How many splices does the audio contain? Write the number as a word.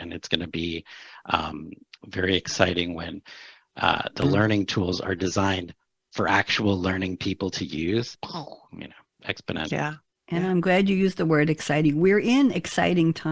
two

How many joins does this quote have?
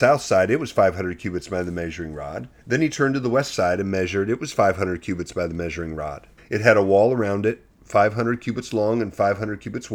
two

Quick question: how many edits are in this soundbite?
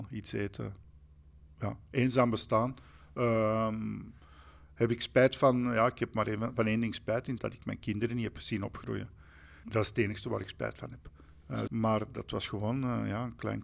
three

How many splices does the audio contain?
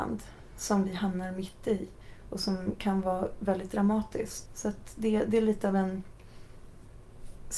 one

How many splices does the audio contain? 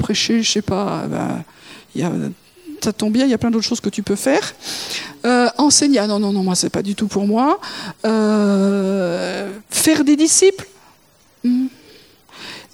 zero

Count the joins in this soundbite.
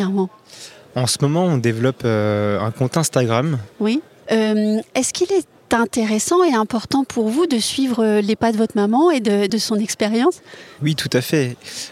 two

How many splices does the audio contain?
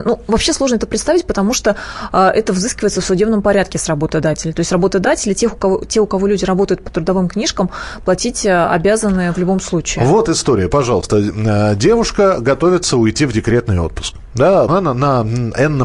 one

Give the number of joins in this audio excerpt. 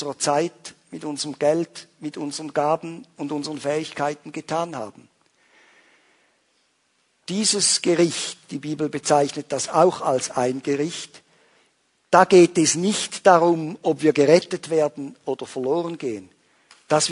zero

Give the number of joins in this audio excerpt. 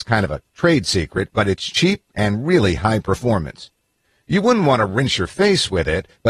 zero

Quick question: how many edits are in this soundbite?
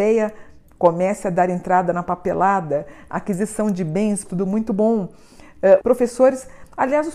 two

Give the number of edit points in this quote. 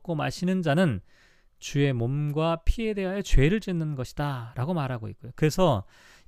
one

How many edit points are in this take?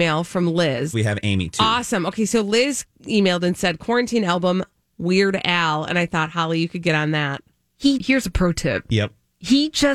two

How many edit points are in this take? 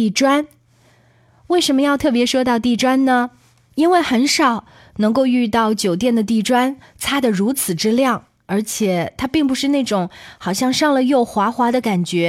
zero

